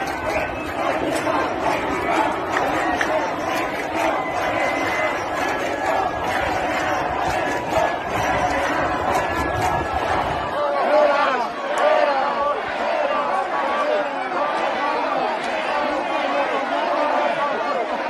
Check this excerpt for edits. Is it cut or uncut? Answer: uncut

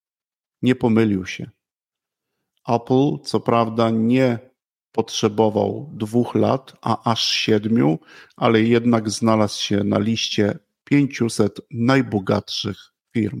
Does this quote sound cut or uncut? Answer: uncut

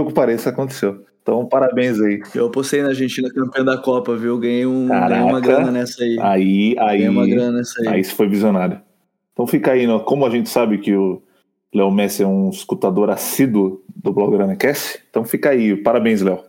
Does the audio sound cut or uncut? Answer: uncut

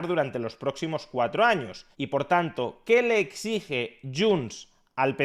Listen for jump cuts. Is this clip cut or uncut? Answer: cut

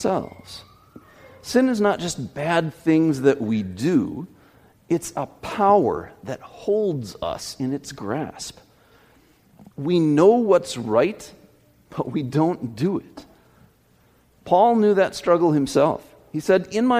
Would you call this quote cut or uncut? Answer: uncut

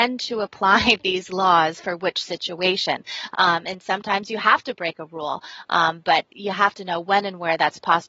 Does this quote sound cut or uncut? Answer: cut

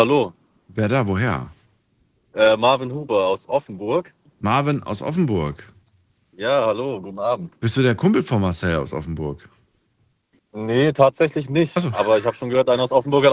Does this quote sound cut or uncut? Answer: uncut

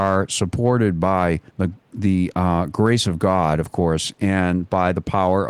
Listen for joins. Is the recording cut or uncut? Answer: cut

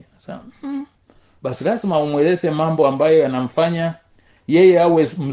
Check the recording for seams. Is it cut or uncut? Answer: uncut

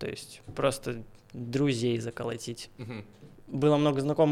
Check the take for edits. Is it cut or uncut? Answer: cut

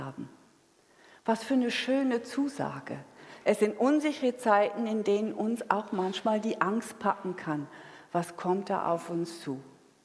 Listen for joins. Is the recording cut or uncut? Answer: cut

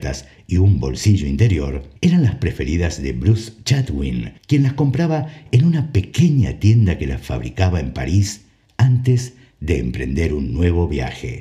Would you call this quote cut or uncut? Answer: cut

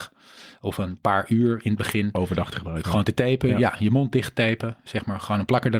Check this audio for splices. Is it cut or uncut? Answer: uncut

